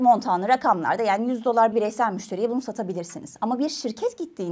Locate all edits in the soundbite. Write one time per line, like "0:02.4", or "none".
0:01.7